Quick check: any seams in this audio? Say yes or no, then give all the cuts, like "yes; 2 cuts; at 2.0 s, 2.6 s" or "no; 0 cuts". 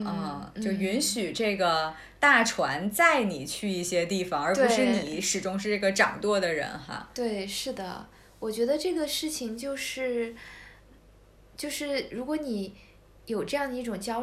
no; 0 cuts